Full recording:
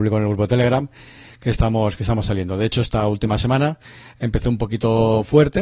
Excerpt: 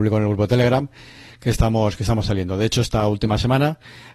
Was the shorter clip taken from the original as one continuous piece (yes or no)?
yes